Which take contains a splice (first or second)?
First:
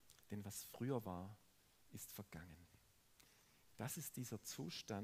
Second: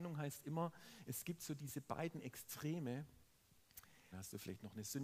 second